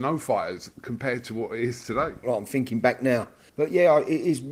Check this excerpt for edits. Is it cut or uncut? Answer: cut